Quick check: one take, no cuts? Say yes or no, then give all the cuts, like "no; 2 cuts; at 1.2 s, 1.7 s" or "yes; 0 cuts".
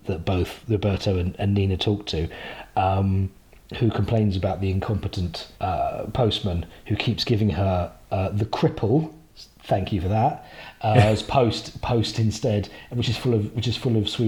no; 1 cut; at 5.5 s